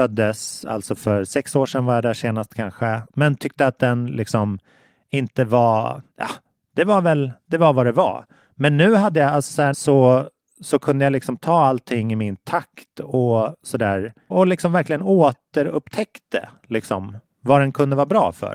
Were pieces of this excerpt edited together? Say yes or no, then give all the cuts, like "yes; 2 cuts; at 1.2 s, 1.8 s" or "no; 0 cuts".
yes; 2 cuts; at 9.7 s, 14.3 s